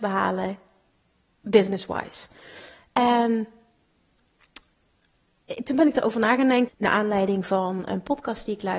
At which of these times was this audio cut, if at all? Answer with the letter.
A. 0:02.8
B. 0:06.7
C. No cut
B